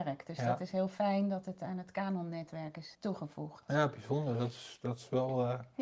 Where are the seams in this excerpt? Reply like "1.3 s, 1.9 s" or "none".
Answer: 2.9 s